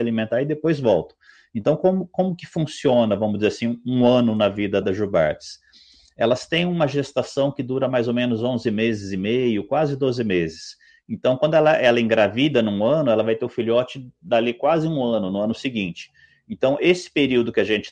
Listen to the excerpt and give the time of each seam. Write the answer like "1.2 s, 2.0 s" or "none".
4.8 s